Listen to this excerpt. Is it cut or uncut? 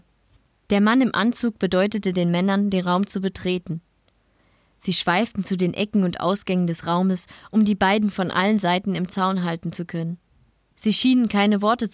cut